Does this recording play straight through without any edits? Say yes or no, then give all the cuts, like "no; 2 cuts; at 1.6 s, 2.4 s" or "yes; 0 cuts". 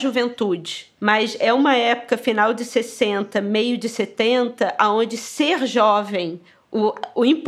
no; 1 cut; at 1.0 s